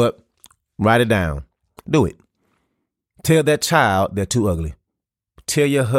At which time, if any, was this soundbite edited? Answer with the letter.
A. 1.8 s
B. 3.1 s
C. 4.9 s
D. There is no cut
A